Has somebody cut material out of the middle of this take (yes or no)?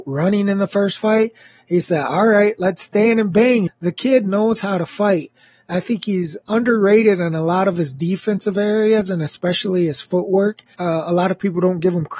yes